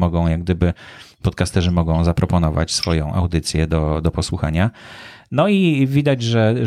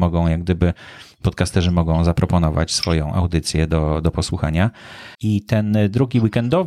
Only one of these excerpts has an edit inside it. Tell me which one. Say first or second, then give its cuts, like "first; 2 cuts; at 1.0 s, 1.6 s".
second; 1 cut; at 5.1 s